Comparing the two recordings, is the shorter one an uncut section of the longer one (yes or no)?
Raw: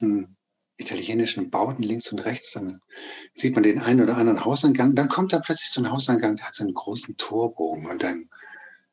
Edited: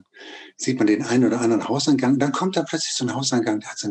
yes